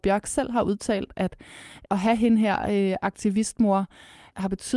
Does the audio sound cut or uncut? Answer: uncut